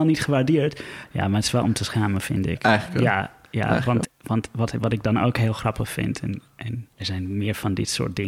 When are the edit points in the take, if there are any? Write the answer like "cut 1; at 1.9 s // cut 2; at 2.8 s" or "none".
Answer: cut 1; at 1.1 s // cut 2; at 4.0 s // cut 3; at 6.9 s